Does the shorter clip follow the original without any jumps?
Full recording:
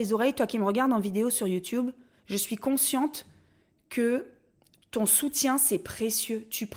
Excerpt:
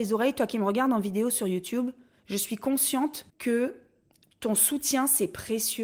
no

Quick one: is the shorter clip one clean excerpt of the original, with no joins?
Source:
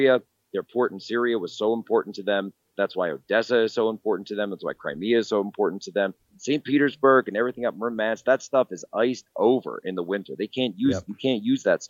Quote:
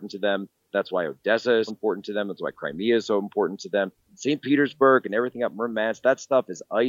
no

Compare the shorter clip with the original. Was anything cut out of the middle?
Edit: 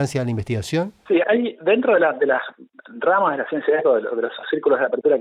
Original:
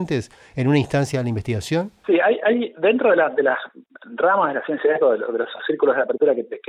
yes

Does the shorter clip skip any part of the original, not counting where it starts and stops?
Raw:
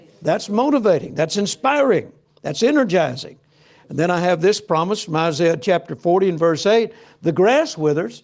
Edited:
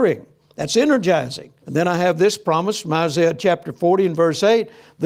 yes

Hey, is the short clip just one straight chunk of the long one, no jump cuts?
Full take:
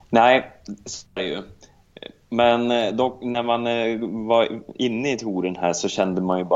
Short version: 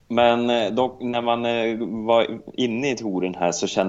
yes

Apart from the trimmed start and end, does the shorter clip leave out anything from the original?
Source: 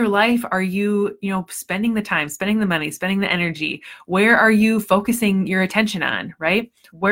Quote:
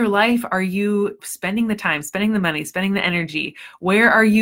yes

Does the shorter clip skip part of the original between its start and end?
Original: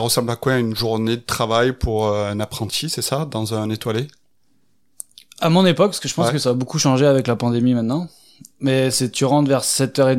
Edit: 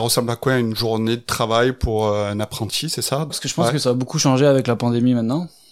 yes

